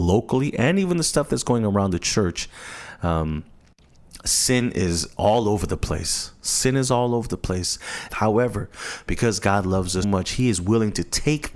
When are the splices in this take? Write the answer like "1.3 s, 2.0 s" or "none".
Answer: 8.1 s, 10.0 s

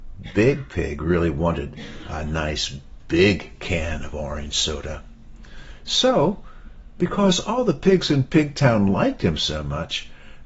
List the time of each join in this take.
none

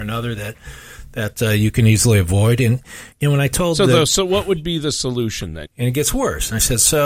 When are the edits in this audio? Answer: 3.1 s, 5.7 s

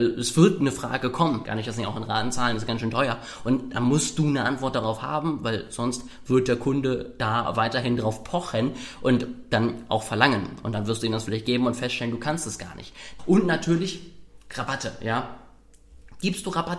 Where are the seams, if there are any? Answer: 1.4 s, 13.2 s

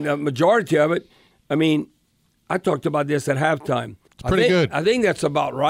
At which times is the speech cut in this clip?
1.3 s, 4.1 s

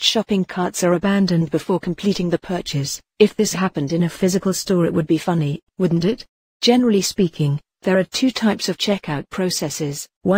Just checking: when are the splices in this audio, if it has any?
3.5 s, 6.5 s

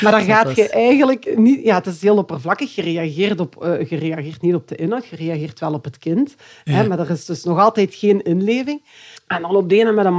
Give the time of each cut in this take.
9.2 s

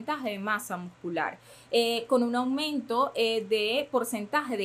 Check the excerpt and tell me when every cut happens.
none

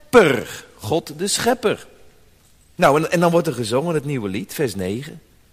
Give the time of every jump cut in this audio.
2.8 s

